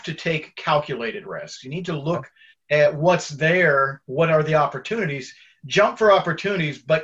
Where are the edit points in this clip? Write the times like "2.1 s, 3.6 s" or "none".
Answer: none

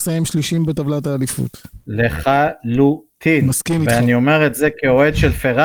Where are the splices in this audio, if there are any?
none

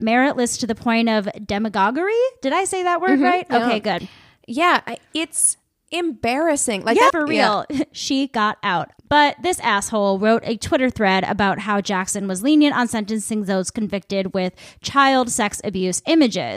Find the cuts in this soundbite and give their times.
7.1 s, 9.0 s

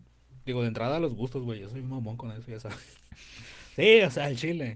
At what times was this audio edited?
none

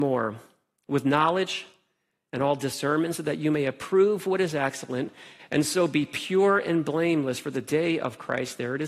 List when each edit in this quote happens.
none

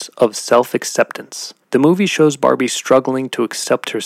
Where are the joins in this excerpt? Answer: 1.6 s

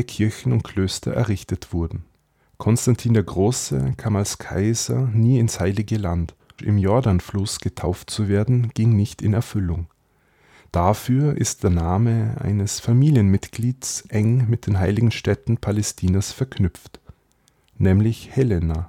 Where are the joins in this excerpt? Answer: 6.6 s

